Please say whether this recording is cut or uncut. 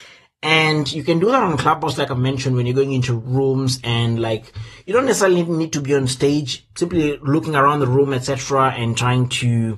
uncut